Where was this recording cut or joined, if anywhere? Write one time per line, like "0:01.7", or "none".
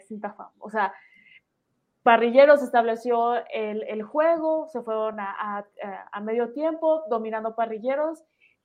none